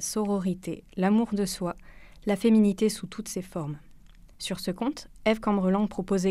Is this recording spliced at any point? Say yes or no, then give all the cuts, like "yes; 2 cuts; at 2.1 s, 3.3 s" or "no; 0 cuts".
yes; 1 cut; at 4.3 s